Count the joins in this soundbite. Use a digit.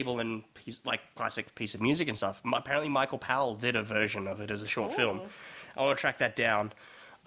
0